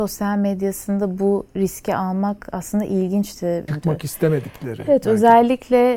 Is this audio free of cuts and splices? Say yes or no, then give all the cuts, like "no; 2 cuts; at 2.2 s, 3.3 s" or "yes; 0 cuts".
no; 1 cut; at 3.7 s